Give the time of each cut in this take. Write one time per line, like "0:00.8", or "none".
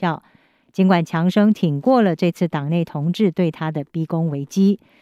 none